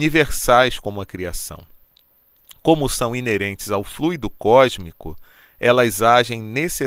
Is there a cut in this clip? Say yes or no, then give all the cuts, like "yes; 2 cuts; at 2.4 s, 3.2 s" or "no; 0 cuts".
no; 0 cuts